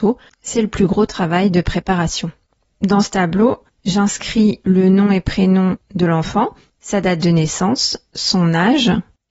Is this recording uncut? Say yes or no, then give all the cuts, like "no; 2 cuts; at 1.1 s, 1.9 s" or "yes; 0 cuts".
no; 1 cut; at 2.6 s